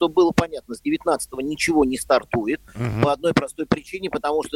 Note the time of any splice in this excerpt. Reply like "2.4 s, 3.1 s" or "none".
none